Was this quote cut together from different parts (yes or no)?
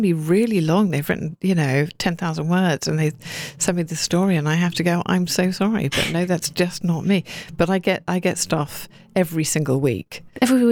no